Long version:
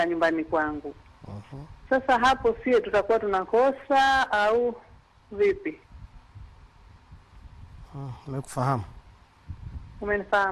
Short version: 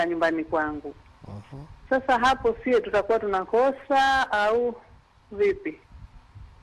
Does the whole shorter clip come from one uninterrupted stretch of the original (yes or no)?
yes